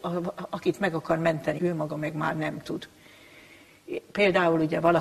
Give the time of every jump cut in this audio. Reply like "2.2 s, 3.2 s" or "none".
1.6 s

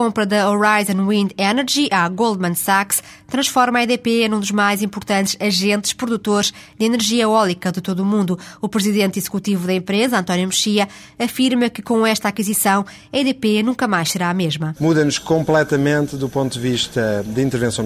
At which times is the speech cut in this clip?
14.8 s

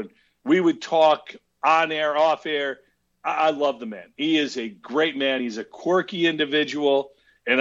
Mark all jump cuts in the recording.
none

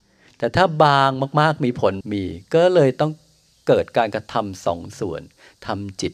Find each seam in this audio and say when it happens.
2.0 s

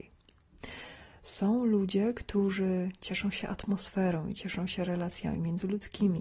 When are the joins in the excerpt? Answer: none

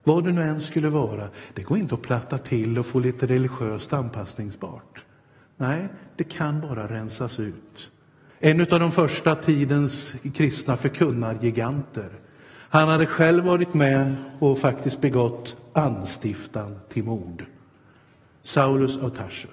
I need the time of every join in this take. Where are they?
8.3 s

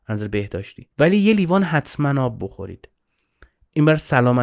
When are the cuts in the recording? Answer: 0.9 s

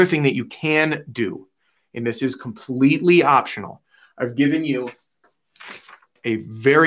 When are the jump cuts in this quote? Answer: none

